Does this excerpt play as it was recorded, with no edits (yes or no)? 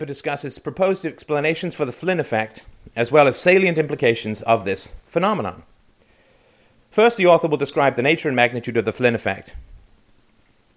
yes